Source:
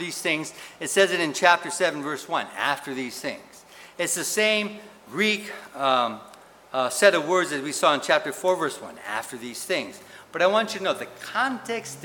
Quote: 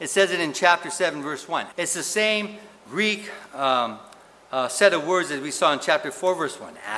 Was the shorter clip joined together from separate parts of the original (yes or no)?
yes